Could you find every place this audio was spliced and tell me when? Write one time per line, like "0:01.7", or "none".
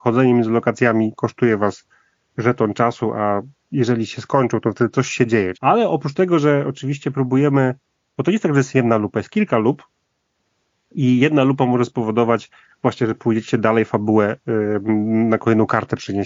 0:05.5